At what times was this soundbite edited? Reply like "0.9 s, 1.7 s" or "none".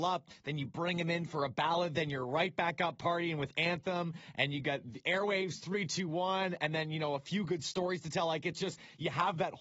none

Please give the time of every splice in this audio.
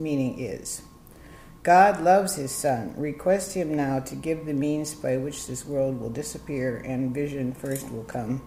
none

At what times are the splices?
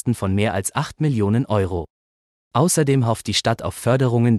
2.4 s

